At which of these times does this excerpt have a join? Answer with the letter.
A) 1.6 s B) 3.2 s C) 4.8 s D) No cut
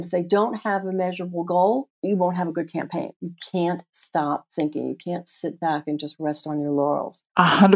B